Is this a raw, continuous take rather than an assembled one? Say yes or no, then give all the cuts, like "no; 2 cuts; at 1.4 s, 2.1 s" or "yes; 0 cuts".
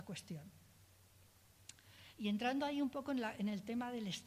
yes; 0 cuts